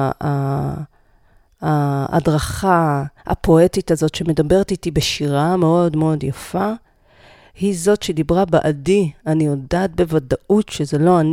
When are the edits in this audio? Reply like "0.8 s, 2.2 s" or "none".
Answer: 3.2 s